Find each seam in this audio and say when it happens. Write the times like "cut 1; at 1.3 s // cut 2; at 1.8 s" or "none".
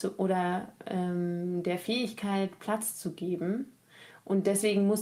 none